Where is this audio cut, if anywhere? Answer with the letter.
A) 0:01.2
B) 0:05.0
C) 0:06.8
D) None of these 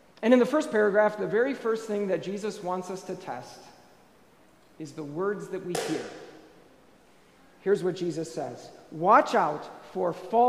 D